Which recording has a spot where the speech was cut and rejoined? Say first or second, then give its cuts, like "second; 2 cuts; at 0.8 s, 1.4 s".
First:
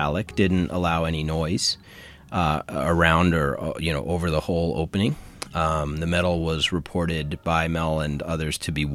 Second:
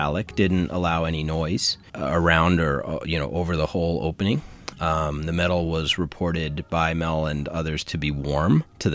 second; 1 cut; at 1.9 s